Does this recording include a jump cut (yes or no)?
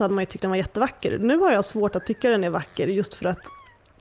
no